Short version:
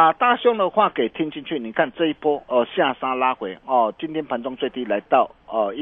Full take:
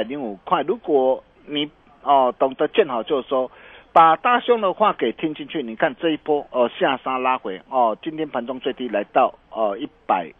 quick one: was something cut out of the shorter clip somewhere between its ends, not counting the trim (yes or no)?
no